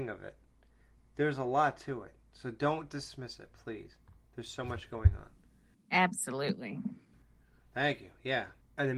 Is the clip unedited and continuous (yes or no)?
yes